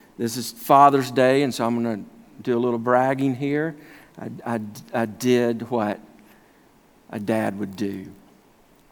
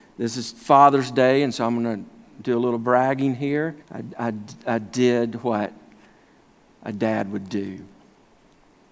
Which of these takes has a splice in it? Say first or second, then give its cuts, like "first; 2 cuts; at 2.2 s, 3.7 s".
second; 1 cut; at 3.8 s